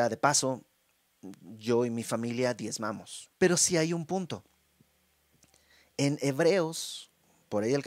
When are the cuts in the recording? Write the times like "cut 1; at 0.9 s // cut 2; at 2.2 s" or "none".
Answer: cut 1; at 3.4 s